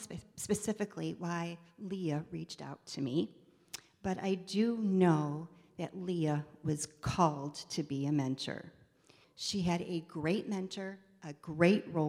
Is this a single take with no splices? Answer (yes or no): no